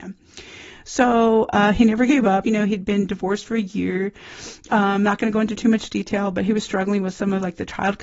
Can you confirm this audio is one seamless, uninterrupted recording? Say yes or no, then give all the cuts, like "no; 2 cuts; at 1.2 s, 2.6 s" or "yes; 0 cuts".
no; 1 cut; at 2.4 s